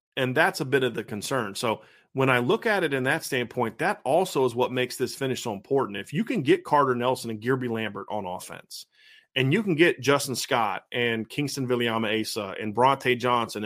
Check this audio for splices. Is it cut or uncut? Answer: uncut